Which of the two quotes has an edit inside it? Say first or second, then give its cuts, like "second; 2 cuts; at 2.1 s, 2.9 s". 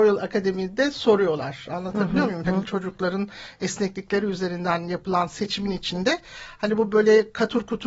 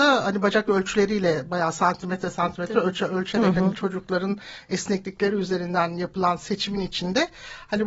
first; 1 cut; at 2.4 s